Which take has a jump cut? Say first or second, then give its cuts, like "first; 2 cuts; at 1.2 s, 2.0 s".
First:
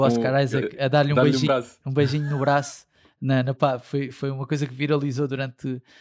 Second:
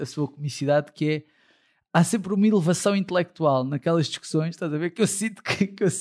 first; 2 cuts; at 1.5 s, 3.6 s